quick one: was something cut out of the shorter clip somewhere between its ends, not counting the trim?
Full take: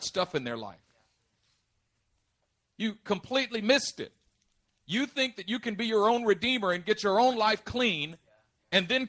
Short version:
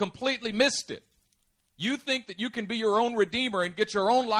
no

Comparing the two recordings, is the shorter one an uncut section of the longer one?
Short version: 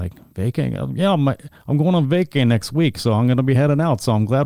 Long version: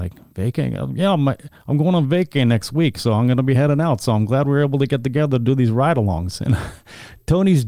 yes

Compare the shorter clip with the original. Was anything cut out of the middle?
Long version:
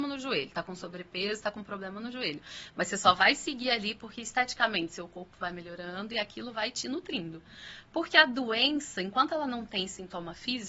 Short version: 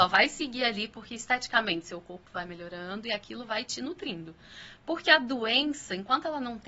no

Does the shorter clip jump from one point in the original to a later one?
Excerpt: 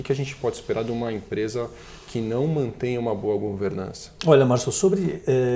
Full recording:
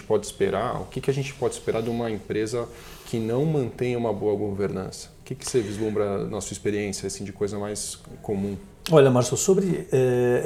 yes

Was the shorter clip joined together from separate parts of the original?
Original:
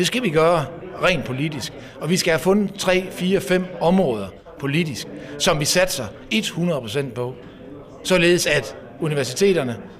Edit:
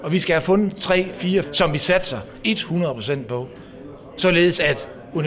yes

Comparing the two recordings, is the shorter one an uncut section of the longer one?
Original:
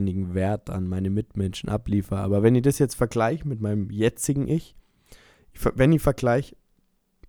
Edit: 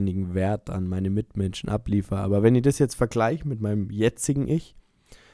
yes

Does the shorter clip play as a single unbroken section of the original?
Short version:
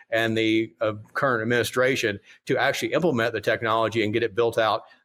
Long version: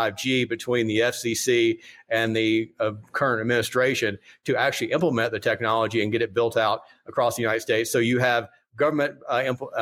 yes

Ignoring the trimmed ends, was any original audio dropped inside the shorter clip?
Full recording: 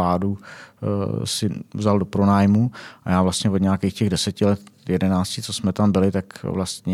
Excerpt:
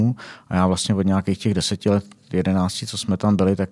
no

